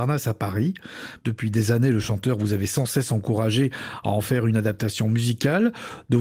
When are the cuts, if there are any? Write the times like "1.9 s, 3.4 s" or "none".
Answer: 1.2 s